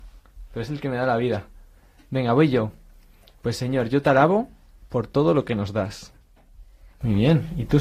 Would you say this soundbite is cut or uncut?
cut